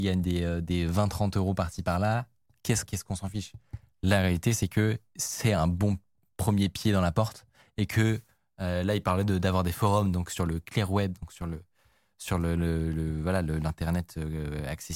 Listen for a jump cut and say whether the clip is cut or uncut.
cut